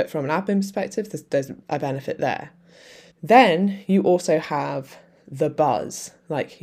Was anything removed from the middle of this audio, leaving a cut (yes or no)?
yes